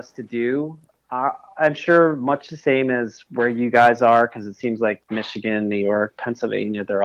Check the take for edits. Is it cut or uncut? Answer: uncut